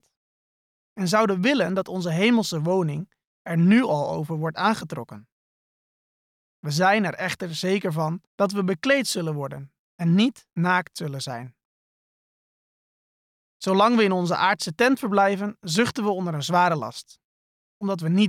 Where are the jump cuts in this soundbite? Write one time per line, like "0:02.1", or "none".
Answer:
0:08.3